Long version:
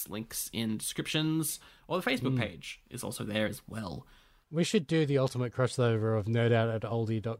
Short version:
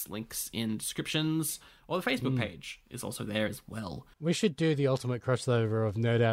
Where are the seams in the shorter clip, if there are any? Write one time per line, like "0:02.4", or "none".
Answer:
0:04.1